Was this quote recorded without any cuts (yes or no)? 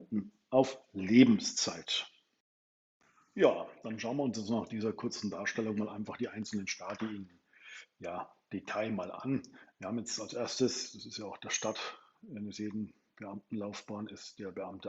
yes